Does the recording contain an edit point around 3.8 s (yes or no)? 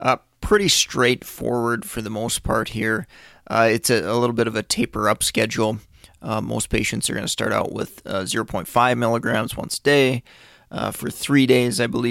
no